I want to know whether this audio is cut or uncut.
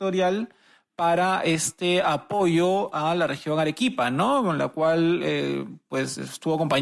uncut